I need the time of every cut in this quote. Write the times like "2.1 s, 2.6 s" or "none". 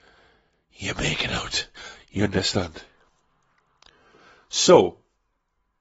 none